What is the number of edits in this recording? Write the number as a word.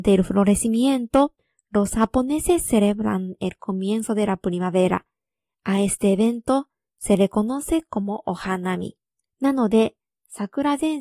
one